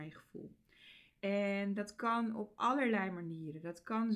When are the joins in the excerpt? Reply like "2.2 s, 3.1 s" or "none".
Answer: 1.1 s